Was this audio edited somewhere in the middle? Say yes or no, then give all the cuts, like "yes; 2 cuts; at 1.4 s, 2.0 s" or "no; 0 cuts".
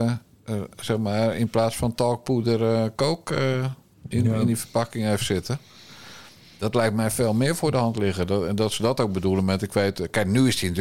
no; 0 cuts